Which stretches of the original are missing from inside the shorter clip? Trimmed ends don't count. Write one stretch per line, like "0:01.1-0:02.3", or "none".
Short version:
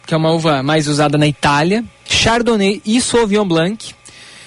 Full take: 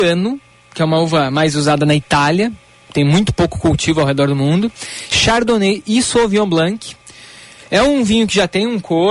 0:02.7-0:05.1